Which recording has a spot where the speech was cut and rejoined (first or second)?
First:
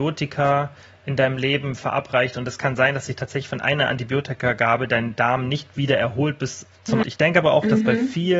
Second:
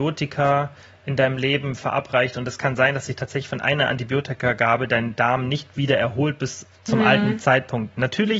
first